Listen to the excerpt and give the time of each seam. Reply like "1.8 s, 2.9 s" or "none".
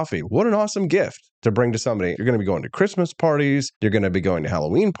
2.2 s, 3.7 s

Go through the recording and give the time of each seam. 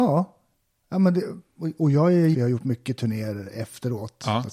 2.3 s

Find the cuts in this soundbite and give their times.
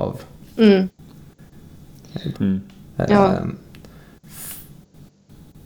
2.3 s

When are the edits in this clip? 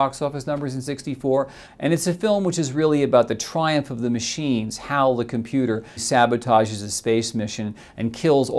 1.6 s, 6.0 s

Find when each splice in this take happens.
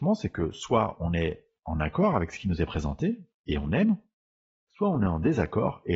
none

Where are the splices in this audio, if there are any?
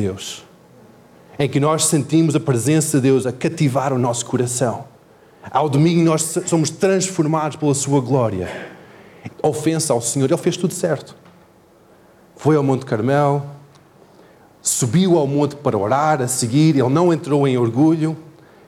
9.3 s

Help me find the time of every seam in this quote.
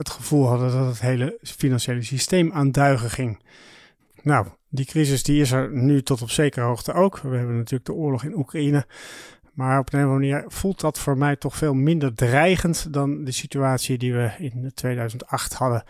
none

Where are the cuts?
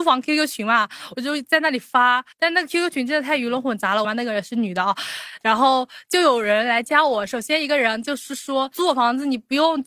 2.3 s, 4.0 s

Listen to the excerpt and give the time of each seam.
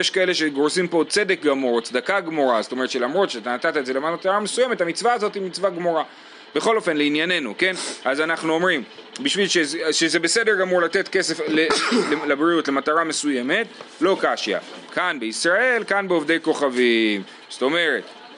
none

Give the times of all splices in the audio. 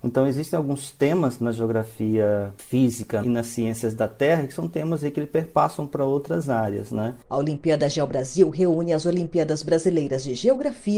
3.2 s

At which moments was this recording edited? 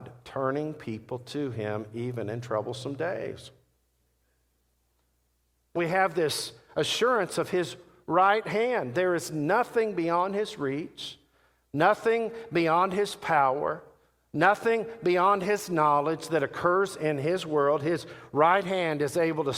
5.8 s

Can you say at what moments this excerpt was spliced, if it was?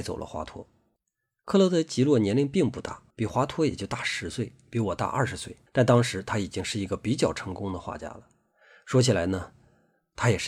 3.1 s, 5.7 s

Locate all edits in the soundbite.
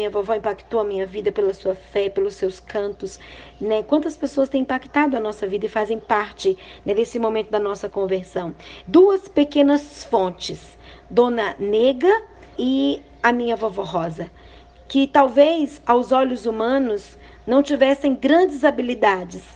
8.8 s, 12.6 s

